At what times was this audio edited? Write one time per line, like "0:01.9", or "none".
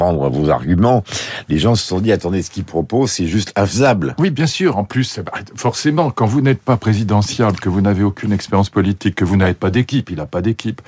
none